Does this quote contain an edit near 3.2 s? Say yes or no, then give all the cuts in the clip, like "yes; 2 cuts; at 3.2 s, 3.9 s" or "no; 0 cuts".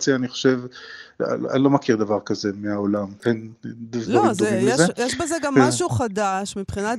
yes; 1 cut; at 3.2 s